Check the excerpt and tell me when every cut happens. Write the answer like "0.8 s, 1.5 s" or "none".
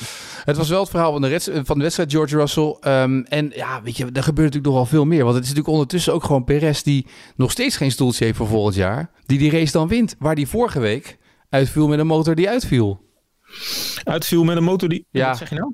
9.2 s